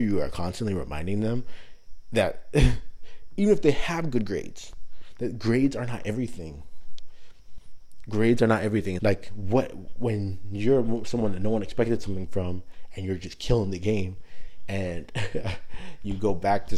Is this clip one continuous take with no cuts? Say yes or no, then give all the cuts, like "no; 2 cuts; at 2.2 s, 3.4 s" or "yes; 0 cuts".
no; 1 cut; at 9.0 s